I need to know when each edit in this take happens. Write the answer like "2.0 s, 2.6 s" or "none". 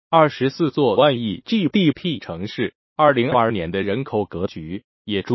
3.3 s